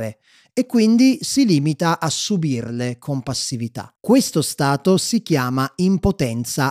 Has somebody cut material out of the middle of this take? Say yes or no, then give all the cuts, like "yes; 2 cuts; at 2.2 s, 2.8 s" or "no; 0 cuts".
yes; 1 cut; at 4.0 s